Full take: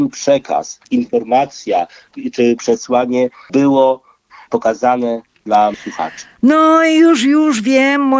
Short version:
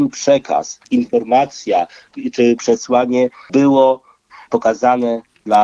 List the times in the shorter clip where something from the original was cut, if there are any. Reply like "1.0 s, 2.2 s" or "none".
none